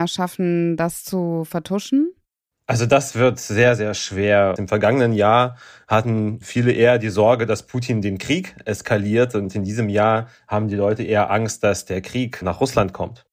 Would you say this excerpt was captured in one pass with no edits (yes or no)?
no